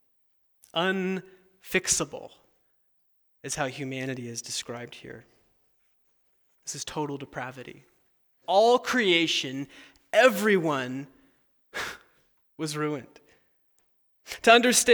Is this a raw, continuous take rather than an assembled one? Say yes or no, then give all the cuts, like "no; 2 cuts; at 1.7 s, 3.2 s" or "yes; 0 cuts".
no; 1 cut; at 8.4 s